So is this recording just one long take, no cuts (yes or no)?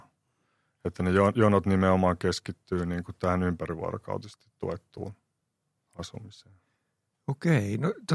yes